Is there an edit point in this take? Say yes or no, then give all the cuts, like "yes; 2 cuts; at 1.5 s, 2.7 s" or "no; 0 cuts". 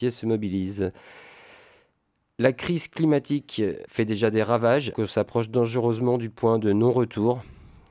yes; 2 cuts; at 3.9 s, 4.9 s